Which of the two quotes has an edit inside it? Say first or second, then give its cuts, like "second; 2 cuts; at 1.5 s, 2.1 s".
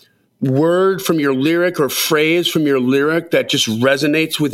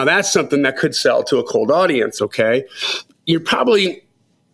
second; 1 cut; at 2.2 s